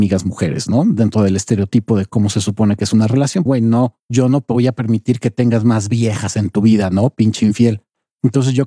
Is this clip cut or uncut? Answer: cut